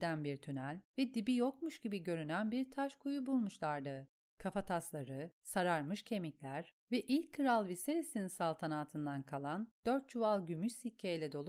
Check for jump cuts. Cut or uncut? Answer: uncut